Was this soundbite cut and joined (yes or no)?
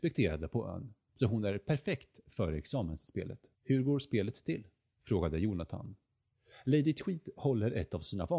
yes